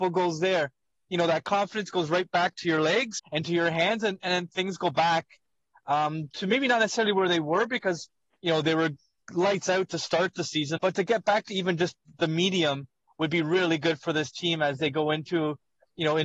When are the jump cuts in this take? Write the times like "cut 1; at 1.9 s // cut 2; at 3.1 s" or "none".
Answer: cut 1; at 3.2 s // cut 2; at 10.8 s

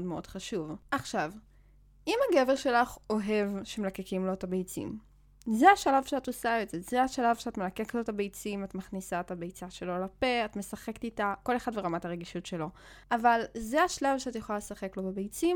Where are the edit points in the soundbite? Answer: cut 1; at 11.4 s

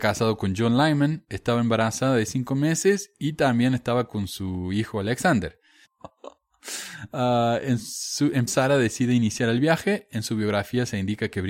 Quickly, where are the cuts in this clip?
cut 1; at 5.8 s // cut 2; at 8.5 s

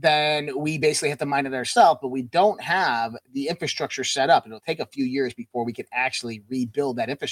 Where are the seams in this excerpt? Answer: none

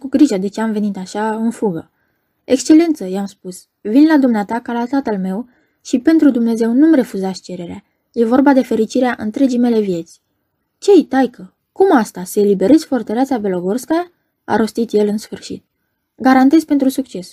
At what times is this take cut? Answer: cut 1; at 11.6 s

